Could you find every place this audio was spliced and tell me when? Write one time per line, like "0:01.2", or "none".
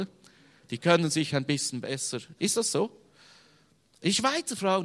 none